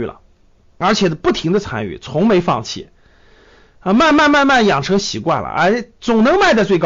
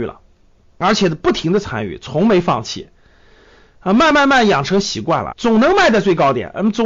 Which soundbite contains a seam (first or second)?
second